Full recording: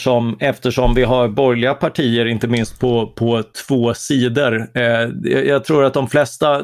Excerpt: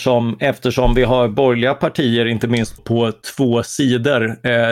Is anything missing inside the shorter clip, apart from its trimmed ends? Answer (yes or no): yes